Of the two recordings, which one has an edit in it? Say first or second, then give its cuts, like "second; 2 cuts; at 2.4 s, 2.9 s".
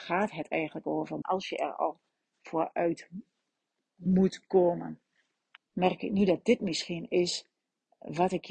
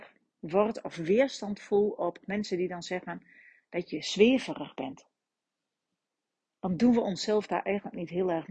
first; 2 cuts; at 1.2 s, 5.6 s